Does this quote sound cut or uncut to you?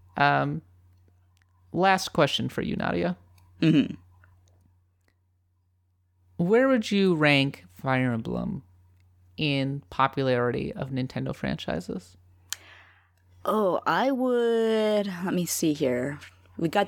uncut